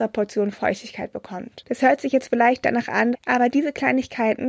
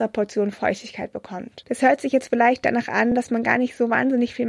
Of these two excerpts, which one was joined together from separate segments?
first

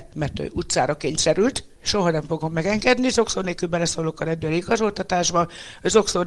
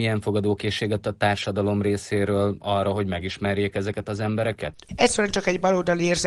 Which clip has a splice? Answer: second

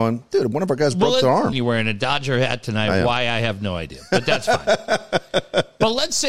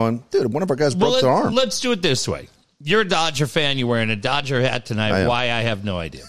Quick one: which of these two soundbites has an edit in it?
first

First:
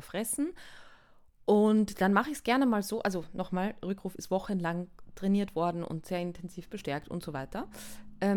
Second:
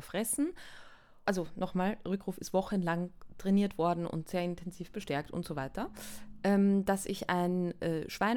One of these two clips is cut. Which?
second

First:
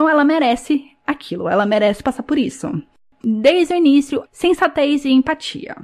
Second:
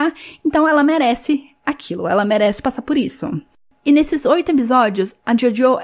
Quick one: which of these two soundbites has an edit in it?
first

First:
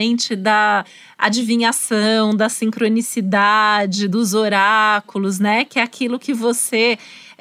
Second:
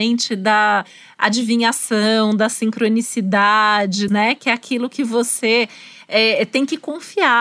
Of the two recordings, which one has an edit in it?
second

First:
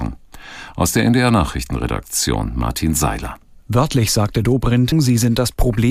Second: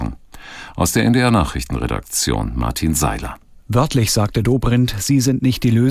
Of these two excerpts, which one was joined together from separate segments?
first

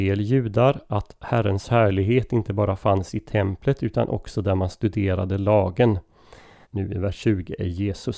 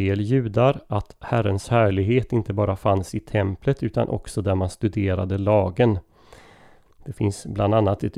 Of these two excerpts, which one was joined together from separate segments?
first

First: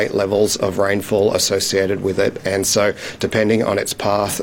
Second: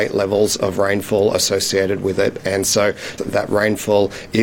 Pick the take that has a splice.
second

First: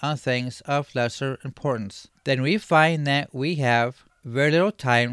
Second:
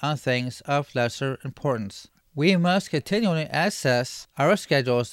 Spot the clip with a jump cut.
second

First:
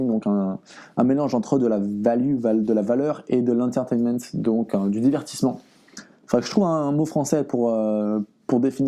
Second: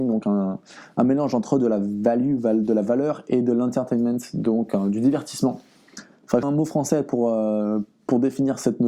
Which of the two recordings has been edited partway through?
second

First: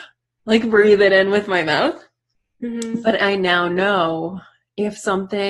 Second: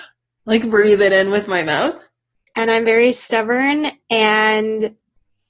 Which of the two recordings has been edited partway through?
second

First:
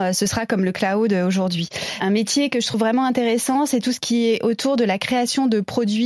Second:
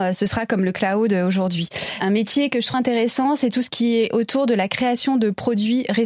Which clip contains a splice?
second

